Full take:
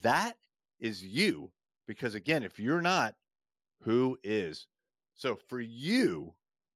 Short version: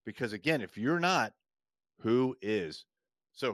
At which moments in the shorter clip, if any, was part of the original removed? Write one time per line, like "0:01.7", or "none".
none